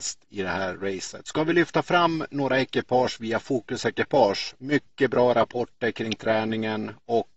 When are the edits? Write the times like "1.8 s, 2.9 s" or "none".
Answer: 4.6 s